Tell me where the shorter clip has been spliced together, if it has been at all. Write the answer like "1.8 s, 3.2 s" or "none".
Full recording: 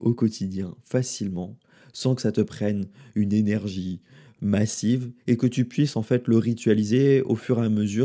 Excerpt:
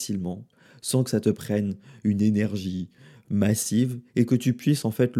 none

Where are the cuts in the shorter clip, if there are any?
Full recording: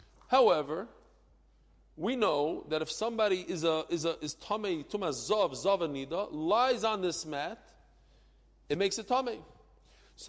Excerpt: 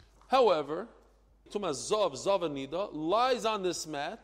1.5 s

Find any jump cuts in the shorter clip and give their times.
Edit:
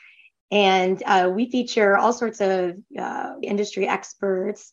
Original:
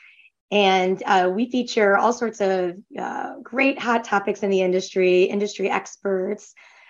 3.4 s

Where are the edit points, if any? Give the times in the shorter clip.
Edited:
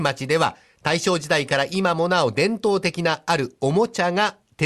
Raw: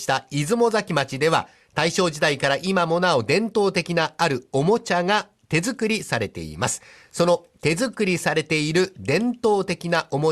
none

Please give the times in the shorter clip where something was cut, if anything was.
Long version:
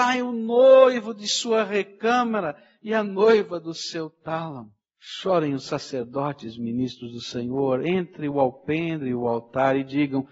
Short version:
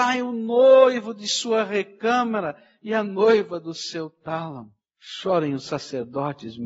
none

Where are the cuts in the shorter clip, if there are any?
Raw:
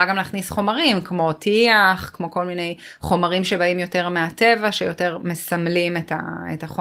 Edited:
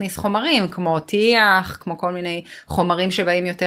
none

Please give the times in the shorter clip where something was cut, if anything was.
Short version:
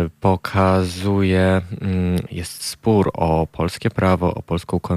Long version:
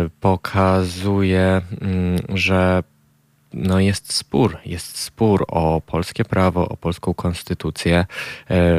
2.3 s

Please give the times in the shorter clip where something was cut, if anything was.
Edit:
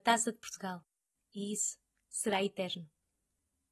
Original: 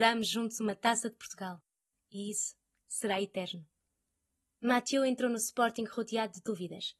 none

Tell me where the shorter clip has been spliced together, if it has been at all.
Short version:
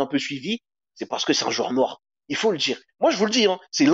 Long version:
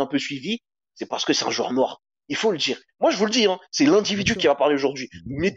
none

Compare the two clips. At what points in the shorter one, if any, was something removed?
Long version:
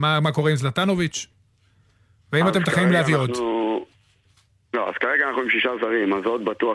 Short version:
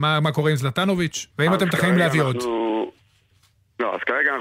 1.3 s

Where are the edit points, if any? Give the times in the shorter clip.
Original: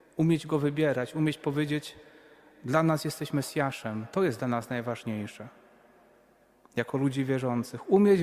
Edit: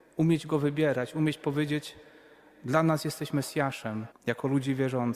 4.1 s

